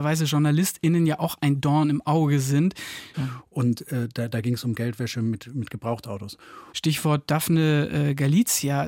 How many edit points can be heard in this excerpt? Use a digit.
2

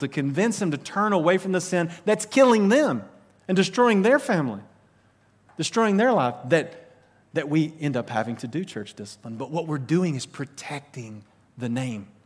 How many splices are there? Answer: 0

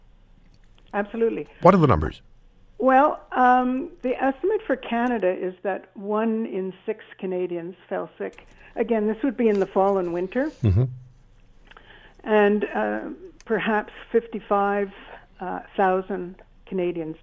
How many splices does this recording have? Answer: 0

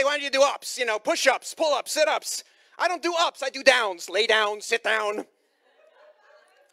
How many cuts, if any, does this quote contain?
0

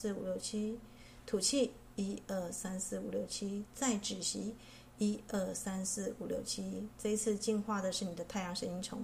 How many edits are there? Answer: 0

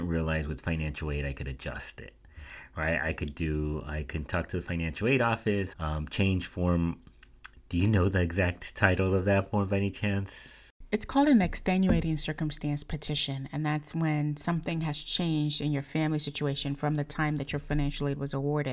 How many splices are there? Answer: 1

